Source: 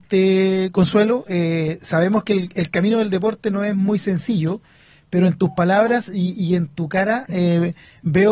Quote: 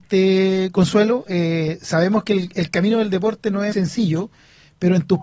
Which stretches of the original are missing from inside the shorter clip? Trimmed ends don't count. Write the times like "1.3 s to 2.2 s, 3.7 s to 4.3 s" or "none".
3.7 s to 4.0 s